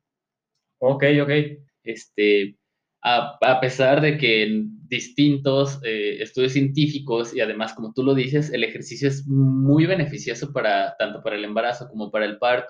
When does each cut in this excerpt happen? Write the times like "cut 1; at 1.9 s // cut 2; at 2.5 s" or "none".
cut 1; at 1.7 s